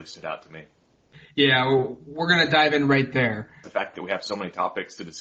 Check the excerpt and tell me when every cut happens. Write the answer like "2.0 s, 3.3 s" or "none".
3.6 s